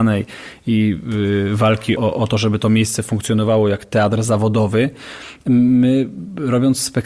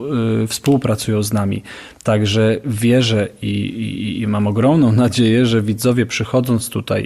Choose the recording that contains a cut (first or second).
first